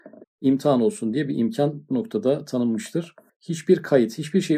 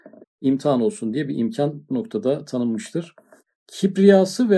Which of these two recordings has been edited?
first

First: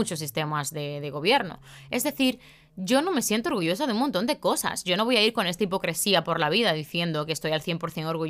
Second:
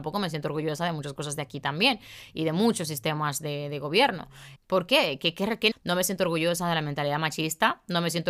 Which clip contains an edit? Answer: second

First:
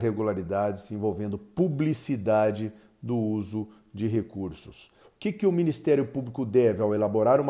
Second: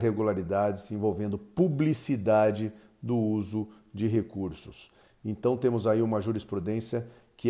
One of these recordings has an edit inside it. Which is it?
first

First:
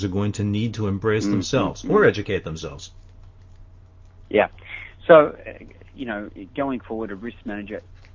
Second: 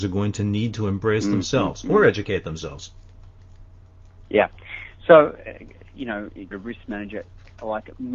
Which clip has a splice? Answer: second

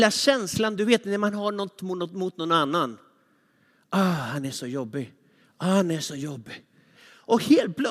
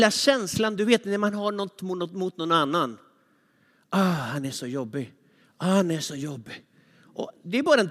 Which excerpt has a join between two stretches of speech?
first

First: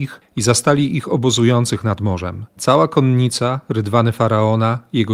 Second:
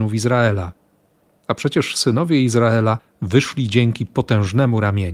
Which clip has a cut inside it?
first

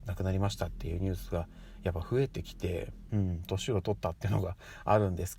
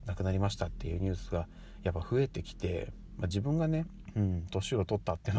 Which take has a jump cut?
first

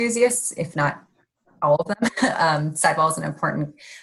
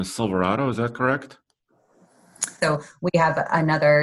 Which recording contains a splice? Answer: second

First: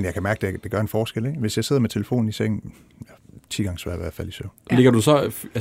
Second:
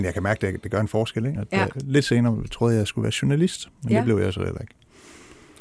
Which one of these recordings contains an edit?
second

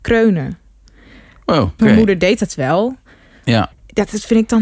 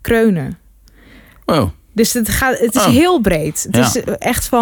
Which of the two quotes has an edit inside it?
first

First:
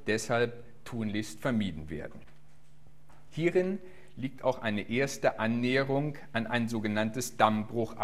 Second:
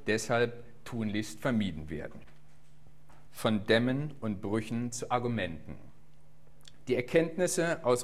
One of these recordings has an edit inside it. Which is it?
second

